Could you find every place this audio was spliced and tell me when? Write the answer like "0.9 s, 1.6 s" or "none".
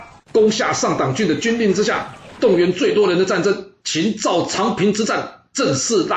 2.4 s